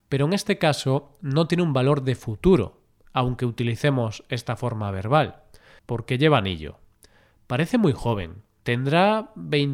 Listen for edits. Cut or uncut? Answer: cut